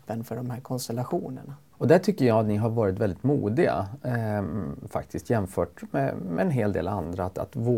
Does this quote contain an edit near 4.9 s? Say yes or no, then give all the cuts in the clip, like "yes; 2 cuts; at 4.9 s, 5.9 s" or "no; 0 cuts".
no; 1 cut; at 1.7 s